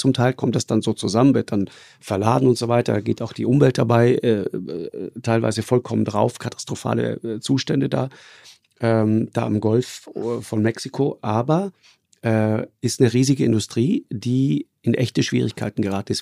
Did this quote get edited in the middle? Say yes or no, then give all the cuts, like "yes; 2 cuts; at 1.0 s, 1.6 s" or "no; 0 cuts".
no; 0 cuts